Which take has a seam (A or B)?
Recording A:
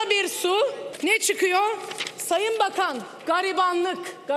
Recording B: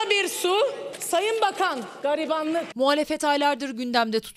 B